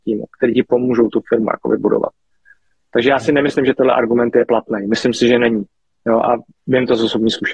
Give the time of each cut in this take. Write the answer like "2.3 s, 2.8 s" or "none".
none